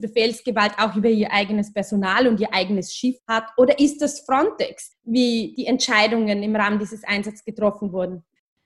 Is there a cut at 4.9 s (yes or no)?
yes